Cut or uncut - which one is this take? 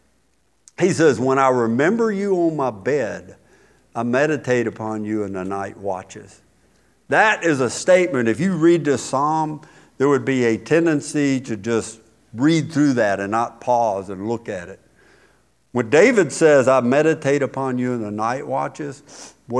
uncut